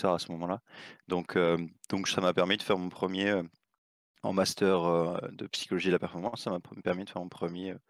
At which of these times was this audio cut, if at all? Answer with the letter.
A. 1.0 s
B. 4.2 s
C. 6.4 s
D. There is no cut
D